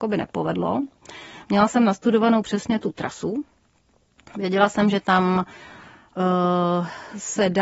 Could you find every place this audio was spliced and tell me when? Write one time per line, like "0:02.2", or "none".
none